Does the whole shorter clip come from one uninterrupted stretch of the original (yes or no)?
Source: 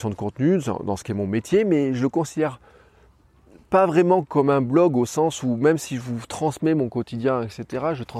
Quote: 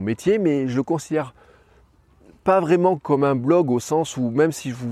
yes